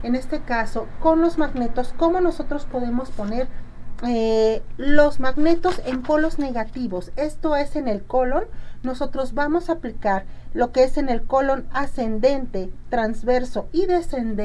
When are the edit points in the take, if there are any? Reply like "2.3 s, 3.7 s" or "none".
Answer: none